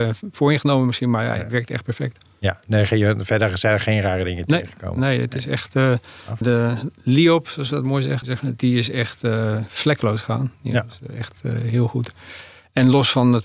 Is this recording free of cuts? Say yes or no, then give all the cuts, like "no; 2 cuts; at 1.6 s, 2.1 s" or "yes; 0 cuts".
no; 2 cuts; at 6.4 s, 8.2 s